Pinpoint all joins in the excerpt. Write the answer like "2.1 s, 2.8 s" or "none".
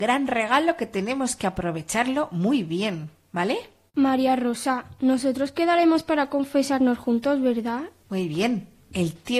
3.9 s, 8.0 s